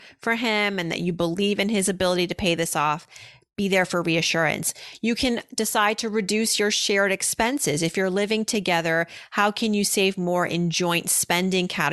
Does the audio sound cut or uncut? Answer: uncut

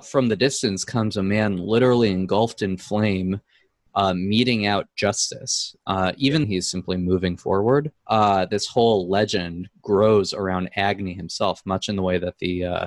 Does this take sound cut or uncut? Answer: cut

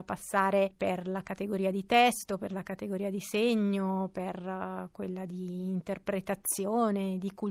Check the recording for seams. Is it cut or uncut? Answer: uncut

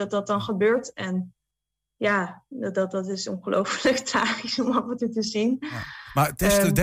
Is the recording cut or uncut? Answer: uncut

